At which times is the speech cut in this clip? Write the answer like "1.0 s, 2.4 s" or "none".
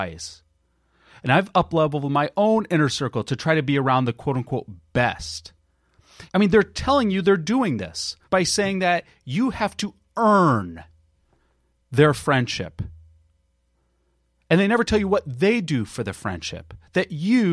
6.3 s, 8.2 s